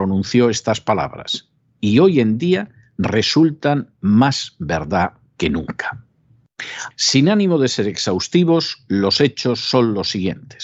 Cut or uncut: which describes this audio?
cut